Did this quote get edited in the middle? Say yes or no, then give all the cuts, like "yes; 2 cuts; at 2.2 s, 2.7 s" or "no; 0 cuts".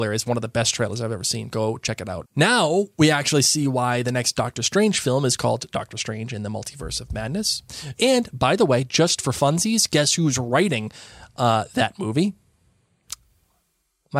yes; 2 cuts; at 2.2 s, 8.0 s